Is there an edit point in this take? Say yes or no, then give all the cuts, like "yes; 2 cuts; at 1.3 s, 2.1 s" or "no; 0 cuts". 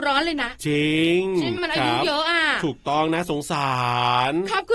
yes; 1 cut; at 1.6 s